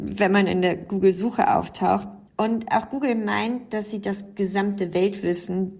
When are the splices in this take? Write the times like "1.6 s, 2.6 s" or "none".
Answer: 2.3 s